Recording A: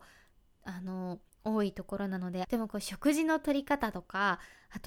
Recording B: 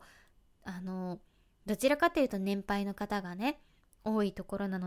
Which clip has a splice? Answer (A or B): A